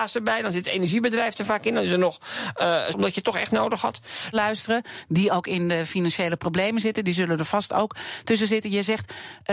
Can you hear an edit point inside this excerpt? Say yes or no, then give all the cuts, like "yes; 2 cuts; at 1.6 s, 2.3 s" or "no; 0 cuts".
yes; 2 cuts; at 2.9 s, 4.3 s